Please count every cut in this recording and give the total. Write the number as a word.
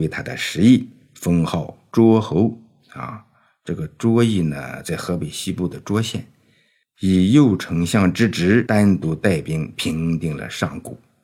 zero